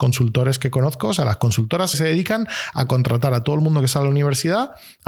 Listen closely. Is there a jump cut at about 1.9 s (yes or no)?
yes